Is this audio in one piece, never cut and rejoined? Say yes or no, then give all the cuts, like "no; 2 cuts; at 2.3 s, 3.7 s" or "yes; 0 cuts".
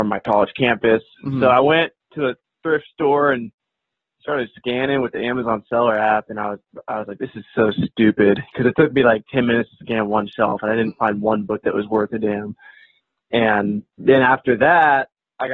yes; 0 cuts